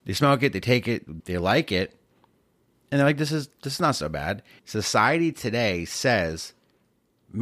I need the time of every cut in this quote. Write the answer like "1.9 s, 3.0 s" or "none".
1.2 s, 4.6 s